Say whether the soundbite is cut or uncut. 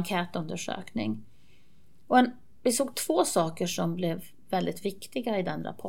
uncut